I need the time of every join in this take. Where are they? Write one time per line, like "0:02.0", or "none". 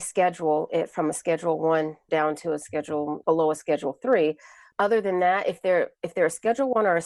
0:02.1
0:03.2
0:04.7